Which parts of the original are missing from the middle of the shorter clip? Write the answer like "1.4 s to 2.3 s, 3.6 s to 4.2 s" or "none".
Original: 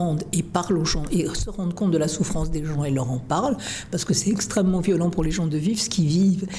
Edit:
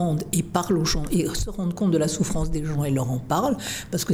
none